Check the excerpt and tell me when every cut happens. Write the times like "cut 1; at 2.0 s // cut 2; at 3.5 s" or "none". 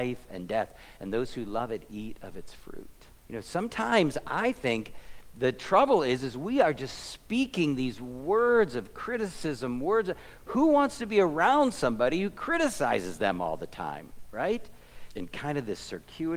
cut 1; at 3.2 s // cut 2; at 15.1 s